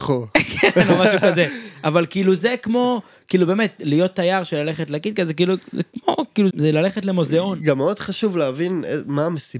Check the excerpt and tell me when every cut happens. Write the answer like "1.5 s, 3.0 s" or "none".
6.5 s

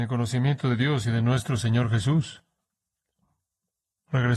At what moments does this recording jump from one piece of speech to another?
none

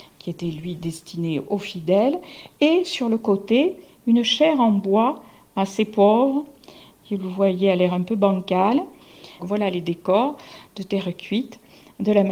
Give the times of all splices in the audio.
9.4 s

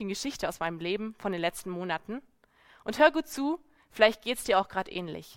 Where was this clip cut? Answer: none

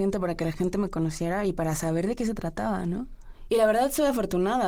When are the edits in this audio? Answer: 3.5 s

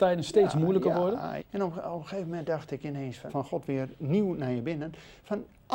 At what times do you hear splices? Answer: 1.4 s, 3.3 s

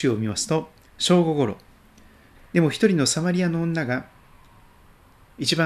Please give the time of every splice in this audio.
2.3 s

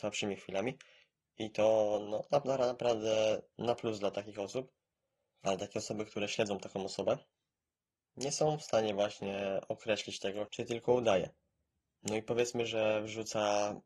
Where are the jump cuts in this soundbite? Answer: 5.4 s, 10.5 s

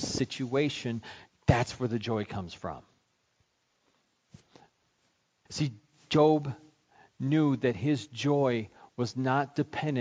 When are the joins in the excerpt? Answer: 1.3 s, 5.5 s

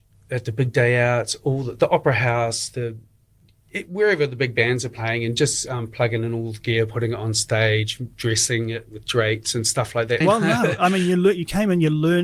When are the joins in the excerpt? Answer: 10.2 s

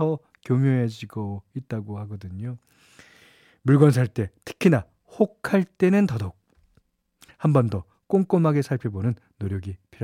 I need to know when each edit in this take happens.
none

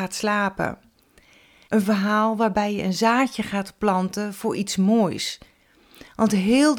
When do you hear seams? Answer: 1.6 s

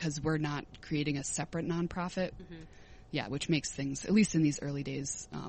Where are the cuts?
2.4 s

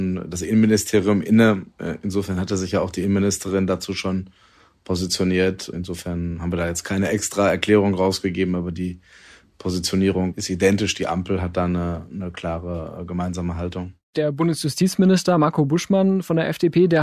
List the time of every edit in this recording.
none

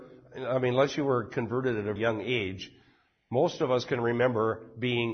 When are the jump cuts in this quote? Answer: 2.0 s

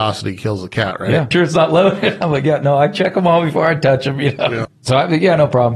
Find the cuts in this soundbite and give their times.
1.3 s, 4.7 s

